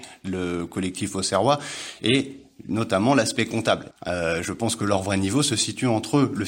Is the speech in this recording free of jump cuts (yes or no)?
no